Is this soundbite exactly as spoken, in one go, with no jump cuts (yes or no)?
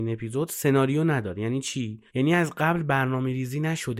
no